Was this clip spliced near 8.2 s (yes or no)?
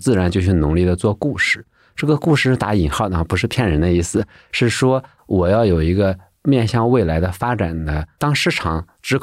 yes